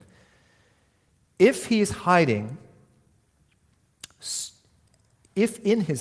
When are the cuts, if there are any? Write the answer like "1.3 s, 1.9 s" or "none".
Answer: none